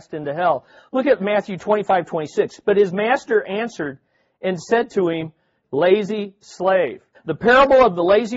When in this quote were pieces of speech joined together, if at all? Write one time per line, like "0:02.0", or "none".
0:05.6
0:07.1